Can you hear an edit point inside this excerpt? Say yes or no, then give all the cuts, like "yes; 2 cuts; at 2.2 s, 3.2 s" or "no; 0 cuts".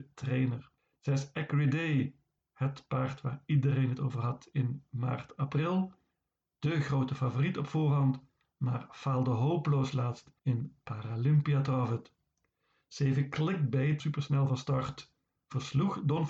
yes; 2 cuts; at 10.4 s, 14.0 s